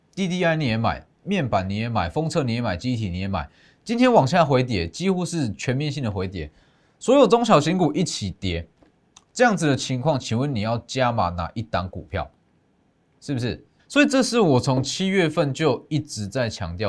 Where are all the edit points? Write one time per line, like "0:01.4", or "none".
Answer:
0:13.8